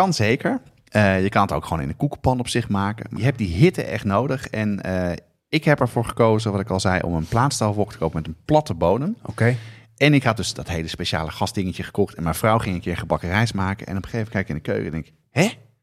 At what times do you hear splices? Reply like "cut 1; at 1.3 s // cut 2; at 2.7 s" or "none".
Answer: cut 1; at 3.2 s